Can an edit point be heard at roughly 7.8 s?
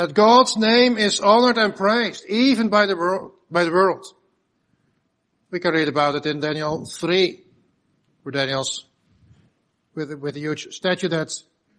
no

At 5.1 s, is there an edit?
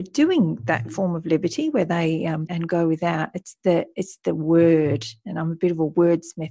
no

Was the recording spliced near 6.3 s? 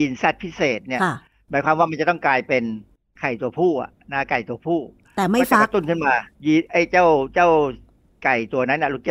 yes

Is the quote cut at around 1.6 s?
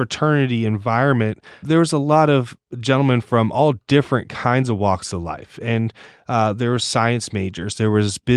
yes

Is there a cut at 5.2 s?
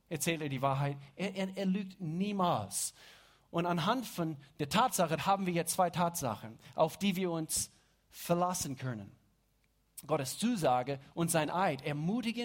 yes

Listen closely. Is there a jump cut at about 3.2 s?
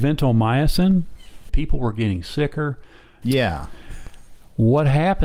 yes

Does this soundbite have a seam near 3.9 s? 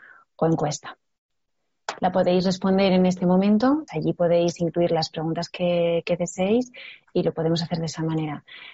yes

